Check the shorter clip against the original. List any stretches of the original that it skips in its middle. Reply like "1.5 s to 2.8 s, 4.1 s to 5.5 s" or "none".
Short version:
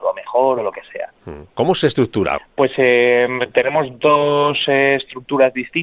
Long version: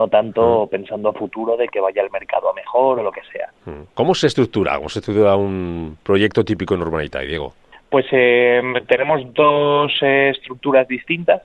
4.8 s to 7.7 s